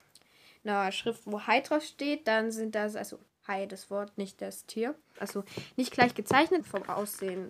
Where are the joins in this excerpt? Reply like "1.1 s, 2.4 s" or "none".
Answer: 5.2 s, 6.6 s